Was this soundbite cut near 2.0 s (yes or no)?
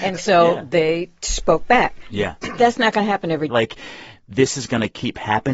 no